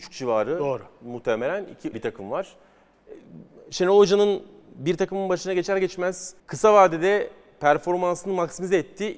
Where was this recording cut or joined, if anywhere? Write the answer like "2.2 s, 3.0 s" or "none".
1.9 s, 6.4 s